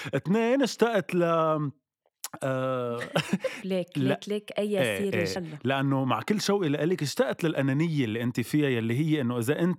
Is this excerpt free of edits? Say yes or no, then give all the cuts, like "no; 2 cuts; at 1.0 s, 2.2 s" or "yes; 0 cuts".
no; 2 cuts; at 3.6 s, 5.4 s